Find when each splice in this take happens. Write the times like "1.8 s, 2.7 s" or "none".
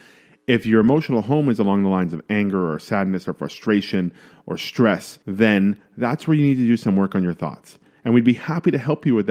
5.2 s

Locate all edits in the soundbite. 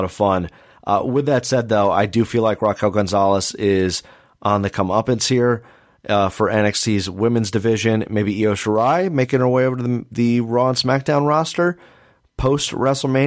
none

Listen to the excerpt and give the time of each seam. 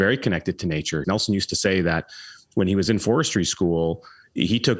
1.0 s

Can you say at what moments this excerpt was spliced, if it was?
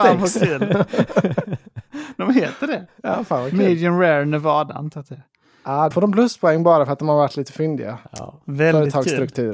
5.9 s

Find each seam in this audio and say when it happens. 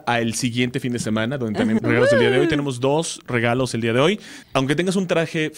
1.8 s, 4.4 s

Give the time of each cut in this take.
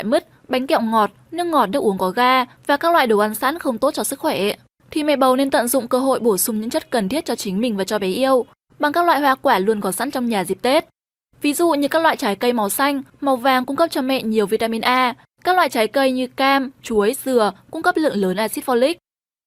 none

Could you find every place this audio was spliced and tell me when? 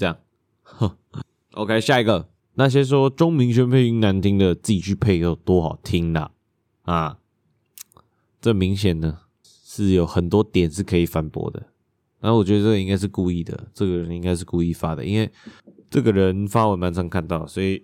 2.4 s

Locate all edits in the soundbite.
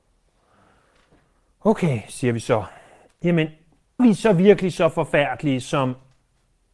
4.0 s

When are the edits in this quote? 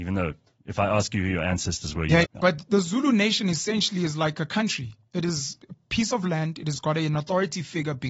2.2 s

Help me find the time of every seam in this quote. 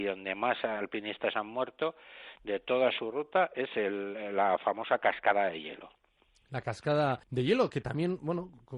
7.2 s

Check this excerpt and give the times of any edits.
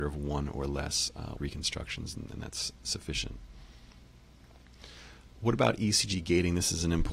1.3 s

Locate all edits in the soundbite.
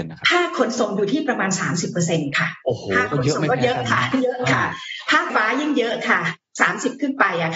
5.3 s

